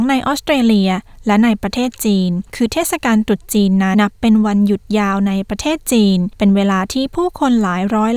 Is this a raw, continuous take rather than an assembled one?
no; 1 cut; at 3.9 s

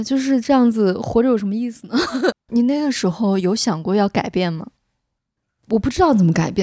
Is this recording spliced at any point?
yes; 1 cut; at 2.3 s

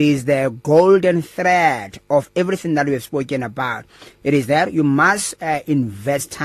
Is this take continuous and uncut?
yes; 0 cuts

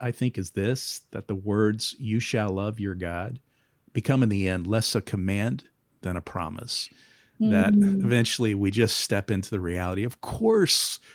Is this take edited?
no; 0 cuts

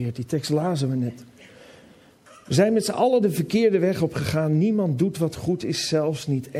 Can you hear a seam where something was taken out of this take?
no; 0 cuts

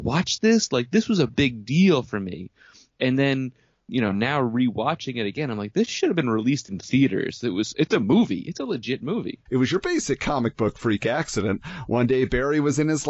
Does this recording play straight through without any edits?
no; 1 cut; at 9.5 s

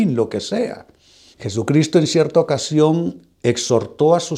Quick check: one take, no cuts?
no; 1 cut; at 1.3 s

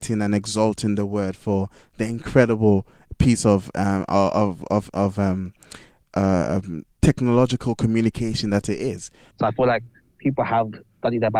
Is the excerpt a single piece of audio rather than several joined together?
no; 2 cuts; at 6.9 s, 9.3 s

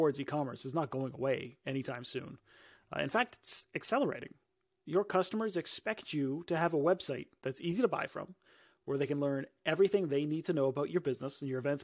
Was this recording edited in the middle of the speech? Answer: no; 0 cuts

